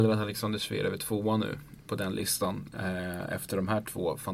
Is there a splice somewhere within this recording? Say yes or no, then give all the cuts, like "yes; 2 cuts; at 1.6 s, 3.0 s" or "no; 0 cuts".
no; 0 cuts